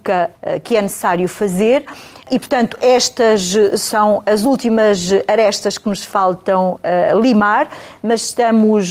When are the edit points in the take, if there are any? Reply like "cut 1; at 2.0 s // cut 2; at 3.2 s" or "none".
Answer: none